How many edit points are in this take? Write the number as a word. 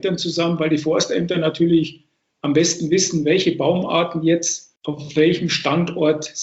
one